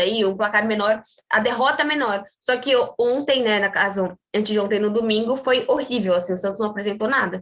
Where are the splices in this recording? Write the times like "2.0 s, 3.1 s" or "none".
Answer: none